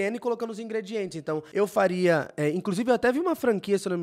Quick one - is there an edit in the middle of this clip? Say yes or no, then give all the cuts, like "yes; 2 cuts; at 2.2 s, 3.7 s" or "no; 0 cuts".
no; 0 cuts